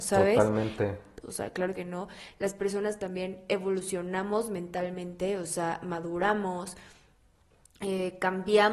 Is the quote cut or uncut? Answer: cut